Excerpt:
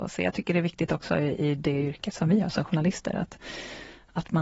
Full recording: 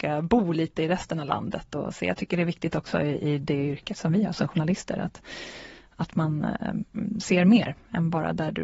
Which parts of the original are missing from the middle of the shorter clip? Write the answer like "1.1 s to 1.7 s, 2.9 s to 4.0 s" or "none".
none